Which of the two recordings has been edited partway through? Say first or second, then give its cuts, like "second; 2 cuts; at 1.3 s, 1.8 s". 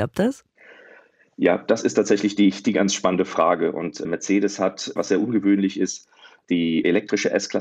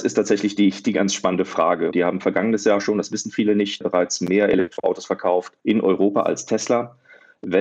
second; 2 cuts; at 1.9 s, 5.6 s